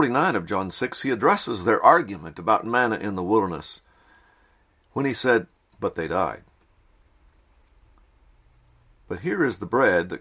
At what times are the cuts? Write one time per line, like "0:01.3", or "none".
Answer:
0:05.7